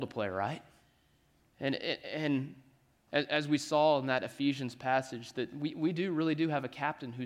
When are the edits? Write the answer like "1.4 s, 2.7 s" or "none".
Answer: 1.4 s